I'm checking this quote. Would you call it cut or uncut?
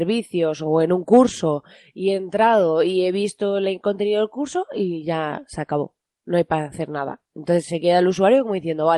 uncut